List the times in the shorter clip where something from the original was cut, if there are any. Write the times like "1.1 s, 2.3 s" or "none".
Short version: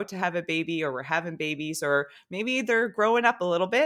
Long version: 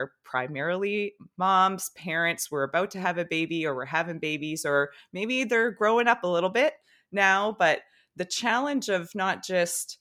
none